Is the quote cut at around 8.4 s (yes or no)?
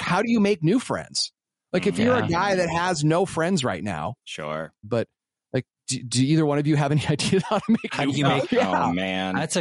yes